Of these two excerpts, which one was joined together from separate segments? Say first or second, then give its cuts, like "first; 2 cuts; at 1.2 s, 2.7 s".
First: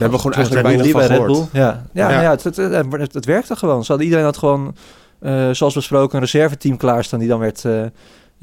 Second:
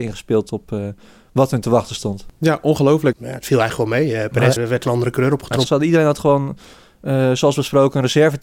second; 3 cuts; at 3.1 s, 4.6 s, 5.6 s